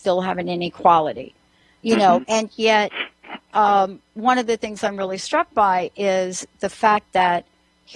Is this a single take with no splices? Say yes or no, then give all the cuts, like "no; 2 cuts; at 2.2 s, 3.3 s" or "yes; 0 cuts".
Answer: no; 1 cut; at 2.2 s